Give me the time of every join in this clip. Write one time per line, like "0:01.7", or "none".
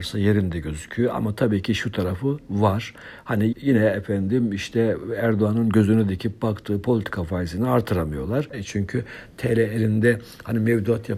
0:03.5
0:08.5